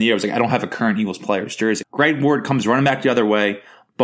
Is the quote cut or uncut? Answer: cut